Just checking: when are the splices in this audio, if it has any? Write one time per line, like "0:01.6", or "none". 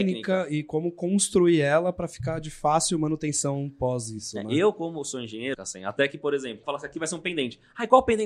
0:05.5
0:06.6

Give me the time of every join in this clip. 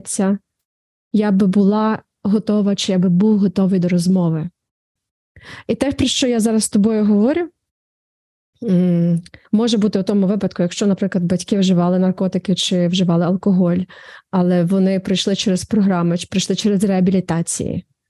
0:09.4

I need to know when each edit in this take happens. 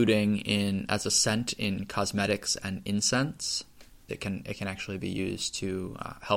0:04.1

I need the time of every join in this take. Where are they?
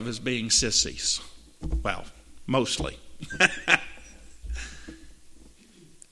none

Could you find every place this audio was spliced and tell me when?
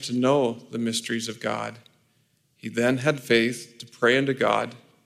none

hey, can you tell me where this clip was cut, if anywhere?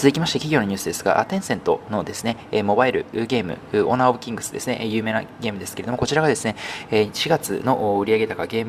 none

